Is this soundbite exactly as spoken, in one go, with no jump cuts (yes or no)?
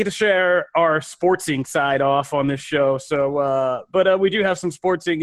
yes